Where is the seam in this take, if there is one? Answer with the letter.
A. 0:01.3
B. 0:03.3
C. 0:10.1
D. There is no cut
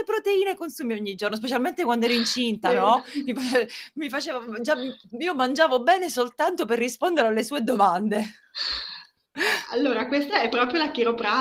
D